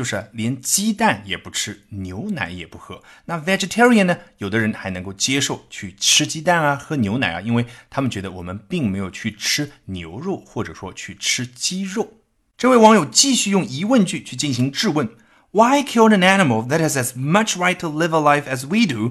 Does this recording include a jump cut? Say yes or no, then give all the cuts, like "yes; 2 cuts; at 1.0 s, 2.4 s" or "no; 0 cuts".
no; 0 cuts